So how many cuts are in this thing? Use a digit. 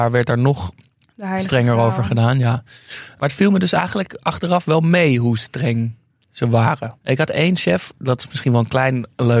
1